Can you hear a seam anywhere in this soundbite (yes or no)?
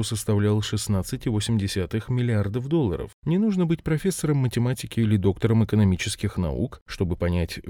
yes